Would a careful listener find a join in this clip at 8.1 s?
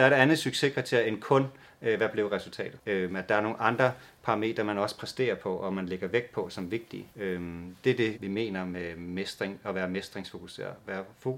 yes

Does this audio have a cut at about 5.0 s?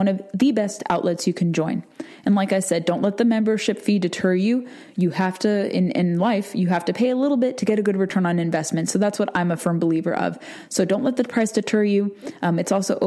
no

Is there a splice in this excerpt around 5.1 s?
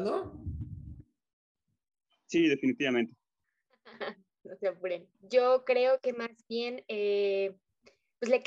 yes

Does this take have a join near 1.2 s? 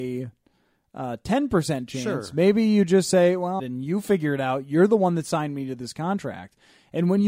no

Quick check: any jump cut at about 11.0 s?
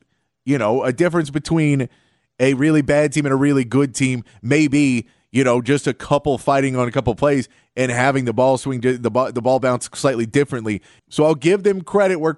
yes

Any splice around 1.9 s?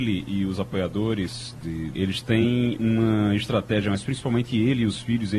yes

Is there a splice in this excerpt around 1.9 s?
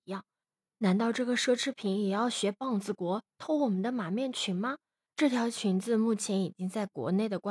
no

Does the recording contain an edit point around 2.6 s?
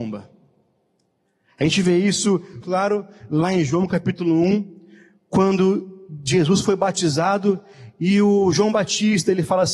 yes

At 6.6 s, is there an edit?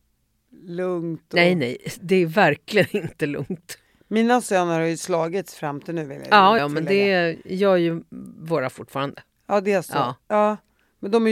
yes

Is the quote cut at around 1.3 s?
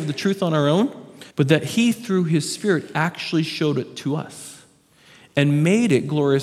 yes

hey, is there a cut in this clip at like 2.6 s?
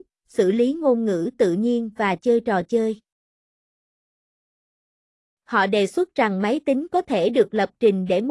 no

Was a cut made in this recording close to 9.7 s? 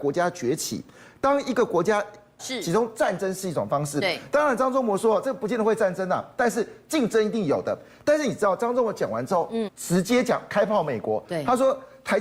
yes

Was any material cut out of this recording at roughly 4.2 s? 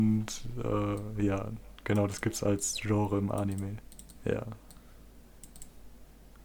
yes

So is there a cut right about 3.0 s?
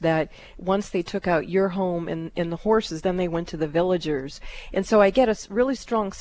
no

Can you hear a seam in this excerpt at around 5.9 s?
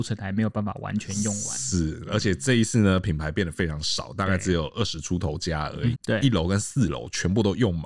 yes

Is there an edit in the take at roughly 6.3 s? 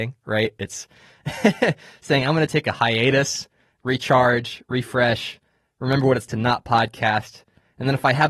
yes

